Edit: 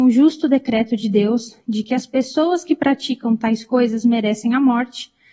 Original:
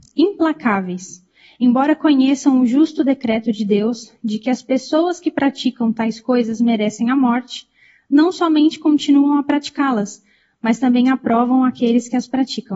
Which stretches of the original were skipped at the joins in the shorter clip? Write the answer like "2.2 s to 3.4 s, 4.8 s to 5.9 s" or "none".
none